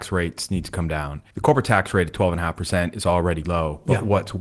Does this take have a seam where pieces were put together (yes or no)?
yes